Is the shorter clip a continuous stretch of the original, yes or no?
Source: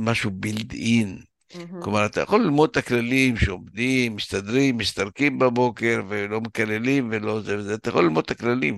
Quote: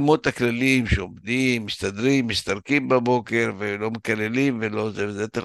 yes